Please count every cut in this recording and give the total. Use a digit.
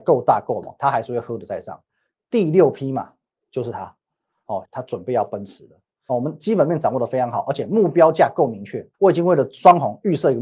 3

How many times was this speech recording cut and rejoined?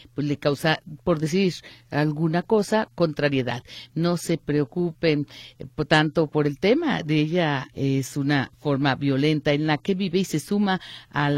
2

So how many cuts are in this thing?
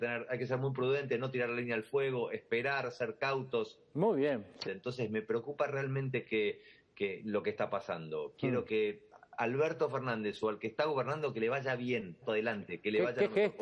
2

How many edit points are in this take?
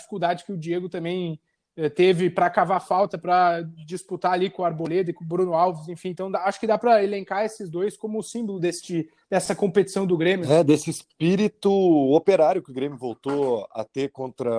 0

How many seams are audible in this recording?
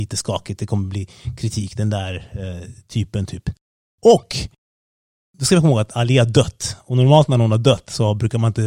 0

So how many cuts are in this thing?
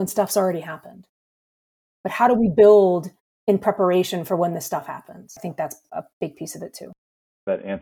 0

